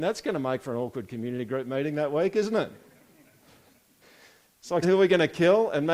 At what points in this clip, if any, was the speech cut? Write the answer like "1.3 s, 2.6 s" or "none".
4.8 s